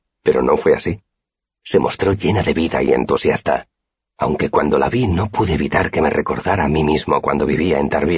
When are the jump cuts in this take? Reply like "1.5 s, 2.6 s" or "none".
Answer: 2.9 s